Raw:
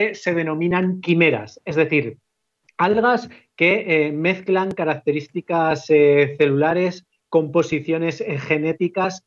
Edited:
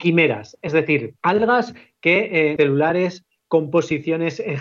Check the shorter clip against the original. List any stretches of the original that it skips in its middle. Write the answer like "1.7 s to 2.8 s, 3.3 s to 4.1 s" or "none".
2.2 s to 2.7 s, 4.1 s to 6.4 s